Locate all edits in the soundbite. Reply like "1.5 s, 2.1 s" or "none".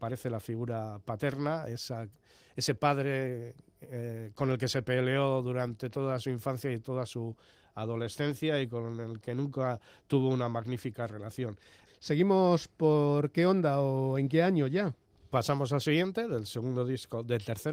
11.9 s